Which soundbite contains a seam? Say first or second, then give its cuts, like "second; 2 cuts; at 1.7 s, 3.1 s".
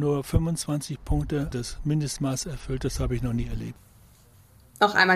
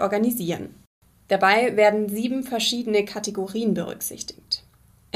first; 1 cut; at 1.5 s